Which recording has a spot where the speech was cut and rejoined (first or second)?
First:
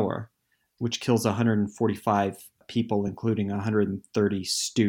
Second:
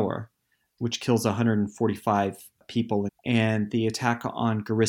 second